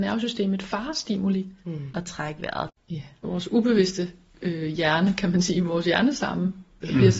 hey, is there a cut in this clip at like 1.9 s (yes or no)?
yes